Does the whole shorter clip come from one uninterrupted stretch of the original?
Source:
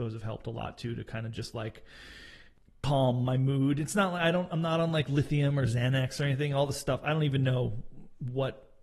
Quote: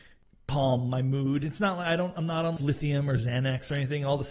no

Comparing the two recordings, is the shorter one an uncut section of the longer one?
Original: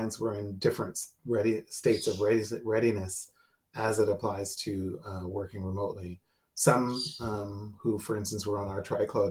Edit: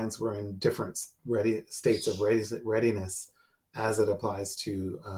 yes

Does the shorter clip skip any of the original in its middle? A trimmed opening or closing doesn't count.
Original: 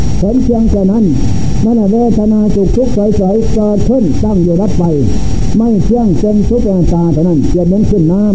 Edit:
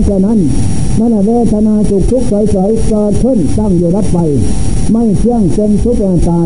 no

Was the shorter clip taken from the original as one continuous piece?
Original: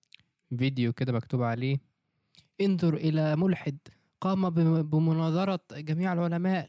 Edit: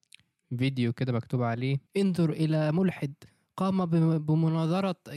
no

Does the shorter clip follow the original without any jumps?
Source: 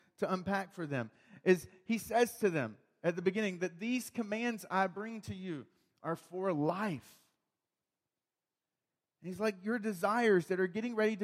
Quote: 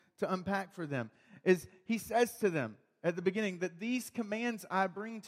yes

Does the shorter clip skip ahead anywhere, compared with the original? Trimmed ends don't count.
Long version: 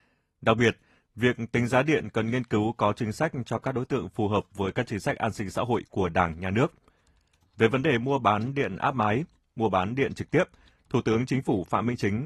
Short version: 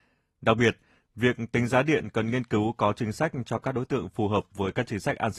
no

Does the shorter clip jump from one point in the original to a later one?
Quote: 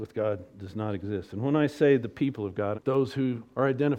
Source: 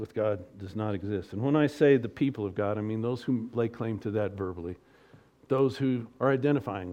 yes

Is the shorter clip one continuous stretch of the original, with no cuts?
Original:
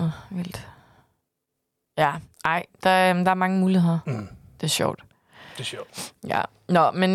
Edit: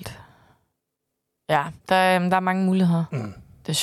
no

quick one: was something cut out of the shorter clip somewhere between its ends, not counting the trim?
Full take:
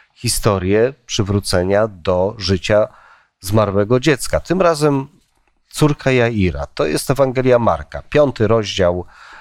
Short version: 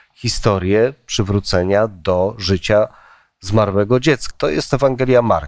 yes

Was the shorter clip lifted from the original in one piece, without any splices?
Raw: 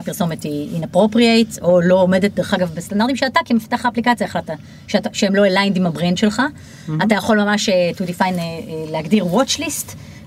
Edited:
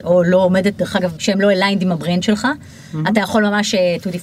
no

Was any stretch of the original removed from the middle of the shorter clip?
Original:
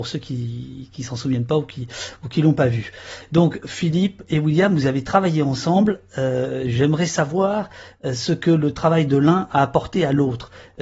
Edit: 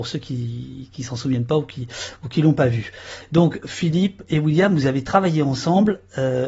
no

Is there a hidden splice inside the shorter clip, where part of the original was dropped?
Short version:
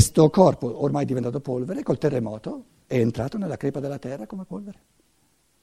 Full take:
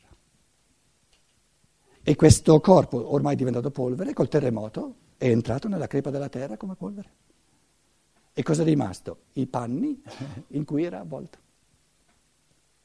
no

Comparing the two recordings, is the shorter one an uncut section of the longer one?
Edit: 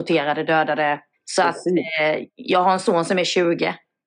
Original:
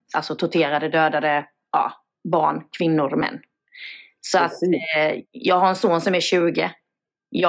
no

